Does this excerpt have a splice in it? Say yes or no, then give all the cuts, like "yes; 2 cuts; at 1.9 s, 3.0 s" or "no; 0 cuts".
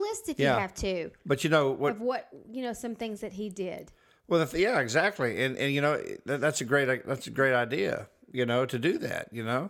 no; 0 cuts